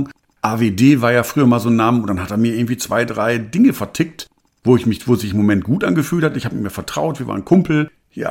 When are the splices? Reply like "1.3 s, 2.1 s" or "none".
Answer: none

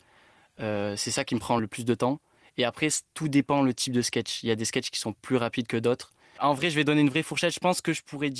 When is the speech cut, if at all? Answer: 1.6 s, 6.4 s

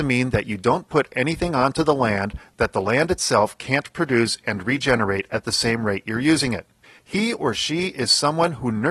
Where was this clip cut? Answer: 7.0 s

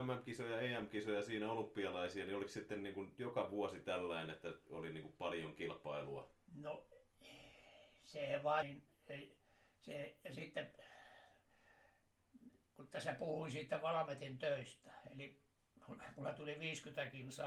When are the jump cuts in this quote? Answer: 6.3 s, 8.6 s

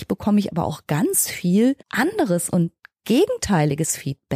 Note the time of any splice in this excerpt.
1.8 s

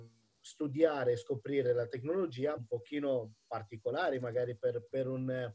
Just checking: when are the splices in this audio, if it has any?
2.6 s

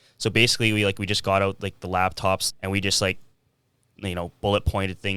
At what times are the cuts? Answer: 2.5 s

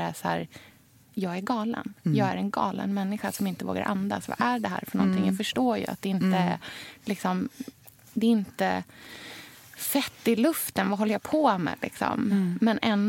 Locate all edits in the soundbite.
none

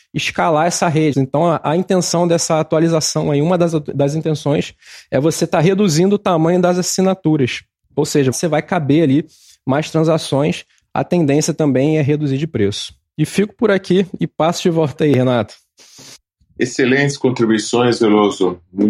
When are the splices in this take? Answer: 1.1 s, 8.3 s

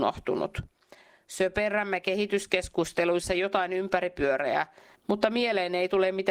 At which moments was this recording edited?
4.9 s

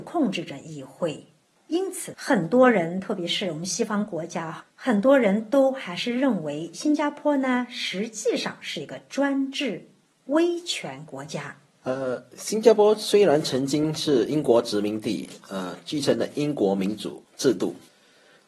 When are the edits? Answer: 11.8 s

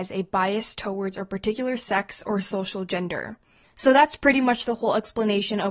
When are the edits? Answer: 3.6 s

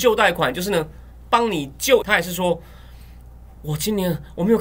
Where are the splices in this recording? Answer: 2.0 s

